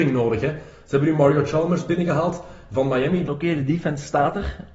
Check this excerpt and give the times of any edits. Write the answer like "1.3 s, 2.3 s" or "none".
3.3 s